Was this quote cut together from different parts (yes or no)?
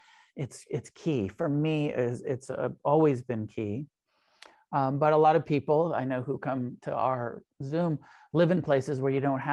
no